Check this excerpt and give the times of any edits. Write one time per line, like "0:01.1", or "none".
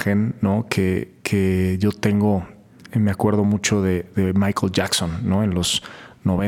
none